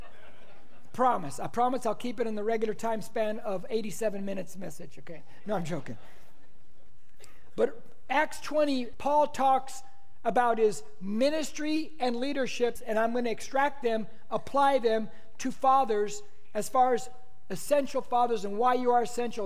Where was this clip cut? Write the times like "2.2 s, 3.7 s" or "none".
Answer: 8.9 s, 12.8 s